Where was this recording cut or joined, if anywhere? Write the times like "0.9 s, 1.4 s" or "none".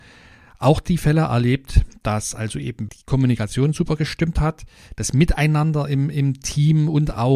2.9 s